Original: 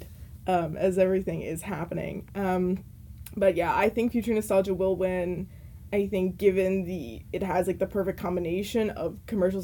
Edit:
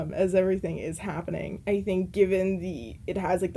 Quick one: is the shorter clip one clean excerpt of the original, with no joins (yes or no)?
no